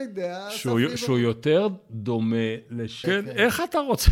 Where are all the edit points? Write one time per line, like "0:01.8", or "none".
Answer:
0:03.0